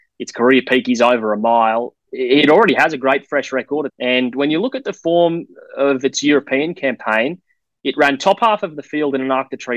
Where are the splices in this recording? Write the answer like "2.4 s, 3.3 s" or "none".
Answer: 1.9 s, 3.9 s